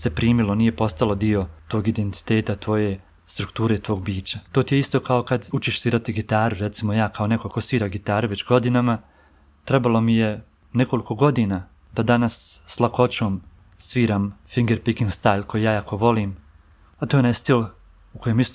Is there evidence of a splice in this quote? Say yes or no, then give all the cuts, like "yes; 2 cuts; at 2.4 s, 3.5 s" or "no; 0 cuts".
yes; 1 cut; at 4.5 s